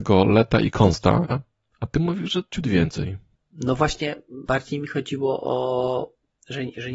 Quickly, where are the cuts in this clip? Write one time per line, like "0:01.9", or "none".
0:01.3